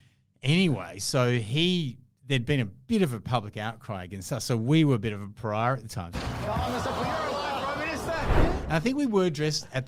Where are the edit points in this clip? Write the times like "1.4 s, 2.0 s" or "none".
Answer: 6.1 s

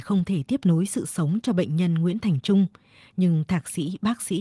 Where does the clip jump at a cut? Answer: none

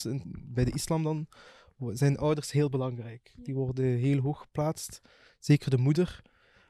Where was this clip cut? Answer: none

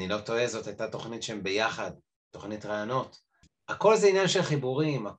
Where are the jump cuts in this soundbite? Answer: 3.5 s

